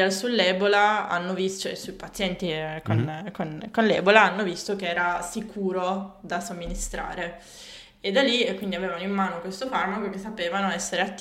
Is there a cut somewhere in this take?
no; 0 cuts

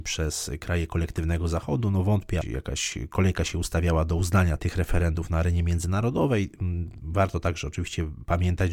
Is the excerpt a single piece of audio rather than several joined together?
no; 2 cuts; at 2.4 s, 4.6 s

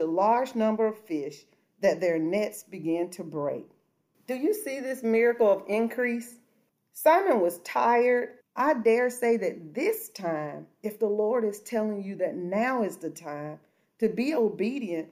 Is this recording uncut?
no; 1 cut; at 8.4 s

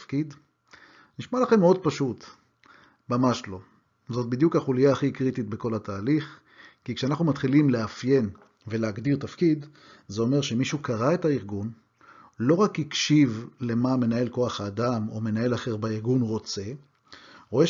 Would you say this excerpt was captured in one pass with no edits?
yes; 0 cuts

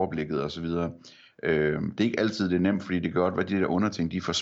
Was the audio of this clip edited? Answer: no; 0 cuts

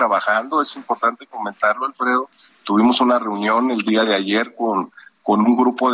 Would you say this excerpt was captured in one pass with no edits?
yes; 0 cuts

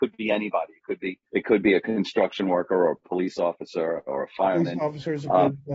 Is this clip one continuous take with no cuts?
no; 1 cut; at 1.3 s

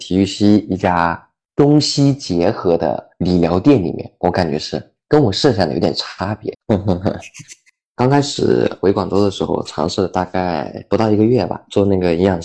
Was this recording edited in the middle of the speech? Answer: yes; 1 cut; at 6.5 s

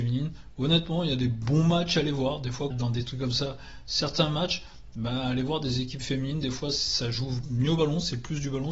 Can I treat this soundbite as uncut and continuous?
no; 1 cut; at 2.7 s

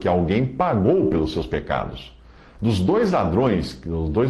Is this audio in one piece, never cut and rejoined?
yes; 0 cuts

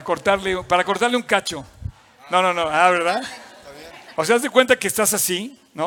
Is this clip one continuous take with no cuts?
yes; 0 cuts

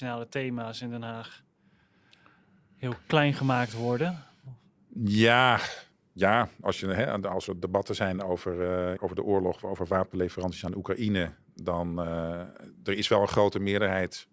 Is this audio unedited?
no; 1 cut; at 9.0 s

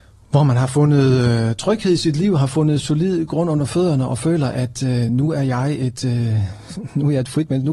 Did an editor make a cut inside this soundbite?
no; 0 cuts

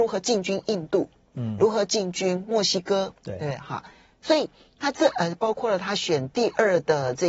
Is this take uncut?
yes; 0 cuts

